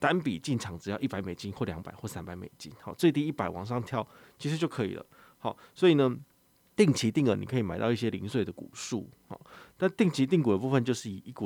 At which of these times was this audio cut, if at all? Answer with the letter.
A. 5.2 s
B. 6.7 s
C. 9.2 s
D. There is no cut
D